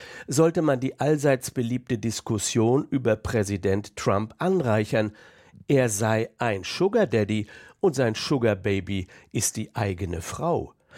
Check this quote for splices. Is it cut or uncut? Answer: uncut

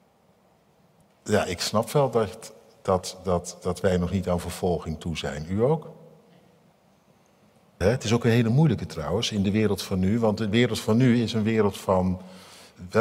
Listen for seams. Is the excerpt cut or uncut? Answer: cut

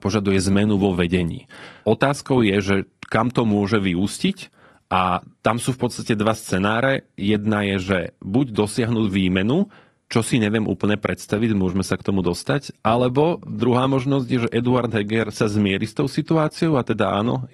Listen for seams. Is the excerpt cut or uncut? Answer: uncut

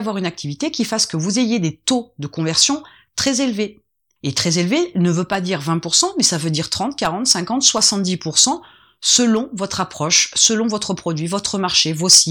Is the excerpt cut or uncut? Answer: uncut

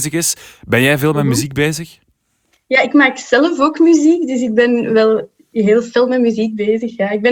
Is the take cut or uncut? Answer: uncut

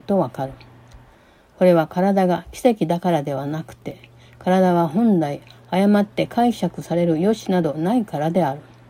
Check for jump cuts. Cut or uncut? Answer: uncut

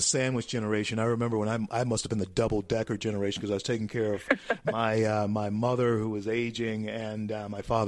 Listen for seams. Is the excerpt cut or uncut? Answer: uncut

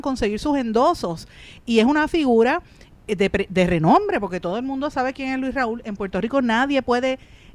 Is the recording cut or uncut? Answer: uncut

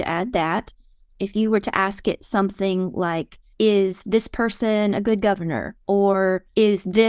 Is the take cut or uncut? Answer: cut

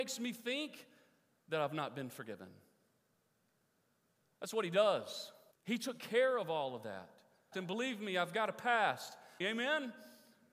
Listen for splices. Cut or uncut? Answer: cut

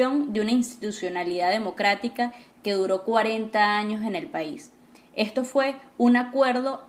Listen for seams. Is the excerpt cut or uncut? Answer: uncut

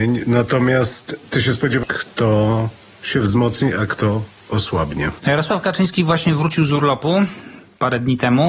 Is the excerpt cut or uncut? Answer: cut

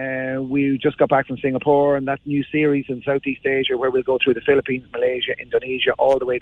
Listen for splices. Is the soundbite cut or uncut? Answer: uncut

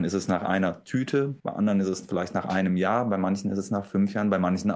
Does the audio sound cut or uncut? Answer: cut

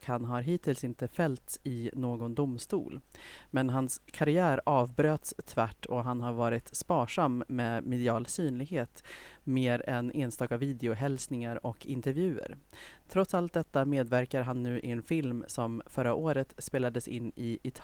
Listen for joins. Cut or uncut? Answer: uncut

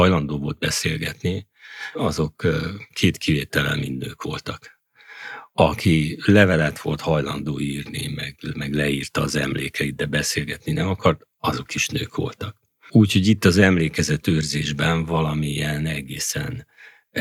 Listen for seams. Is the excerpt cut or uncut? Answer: uncut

